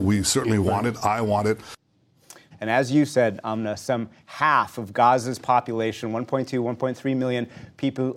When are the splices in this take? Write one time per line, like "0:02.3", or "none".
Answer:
0:02.5